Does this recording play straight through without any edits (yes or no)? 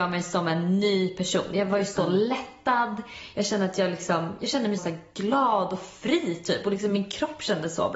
no